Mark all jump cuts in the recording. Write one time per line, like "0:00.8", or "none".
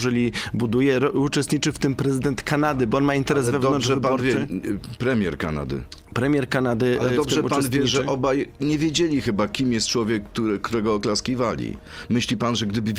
none